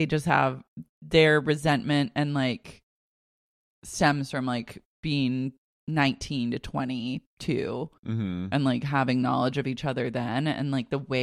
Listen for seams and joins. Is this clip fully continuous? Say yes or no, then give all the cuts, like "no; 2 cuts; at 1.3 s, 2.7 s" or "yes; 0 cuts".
yes; 0 cuts